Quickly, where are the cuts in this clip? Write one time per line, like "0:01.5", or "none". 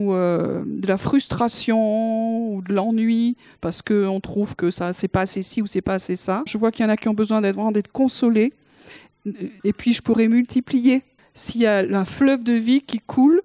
0:06.5
0:09.6
0:11.2